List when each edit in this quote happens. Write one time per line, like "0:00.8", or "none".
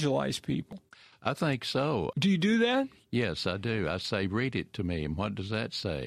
0:02.1